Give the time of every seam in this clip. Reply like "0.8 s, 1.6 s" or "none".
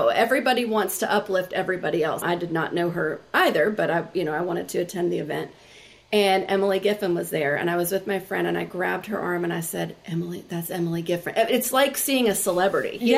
2.2 s